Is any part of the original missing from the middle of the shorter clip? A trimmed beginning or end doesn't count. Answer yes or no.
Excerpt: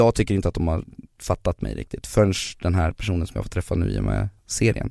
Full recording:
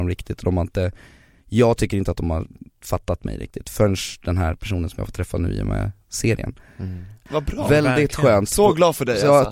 no